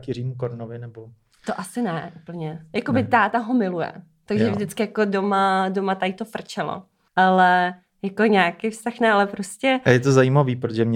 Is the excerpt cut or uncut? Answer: uncut